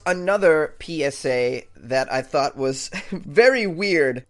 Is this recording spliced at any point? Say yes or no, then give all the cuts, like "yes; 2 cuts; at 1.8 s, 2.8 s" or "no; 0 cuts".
no; 0 cuts